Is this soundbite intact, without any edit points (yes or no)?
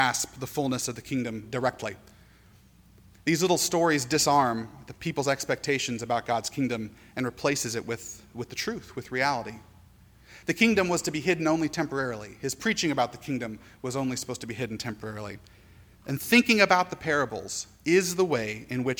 no